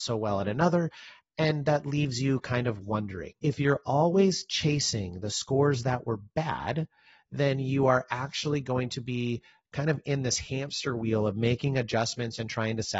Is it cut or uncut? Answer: cut